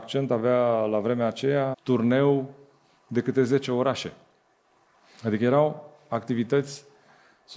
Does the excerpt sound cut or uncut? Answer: cut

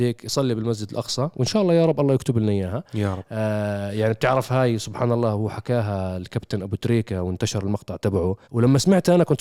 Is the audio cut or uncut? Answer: cut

